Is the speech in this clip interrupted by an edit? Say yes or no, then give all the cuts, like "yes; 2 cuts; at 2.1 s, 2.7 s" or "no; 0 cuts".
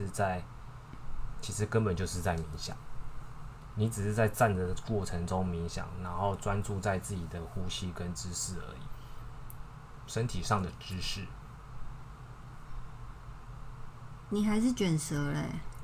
no; 0 cuts